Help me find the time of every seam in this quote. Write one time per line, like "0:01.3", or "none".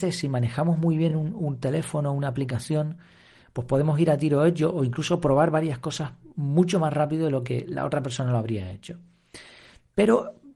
none